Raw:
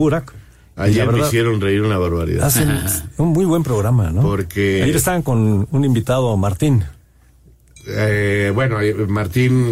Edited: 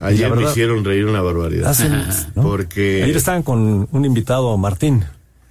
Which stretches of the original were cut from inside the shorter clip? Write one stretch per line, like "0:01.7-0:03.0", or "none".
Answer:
0:03.1-0:04.2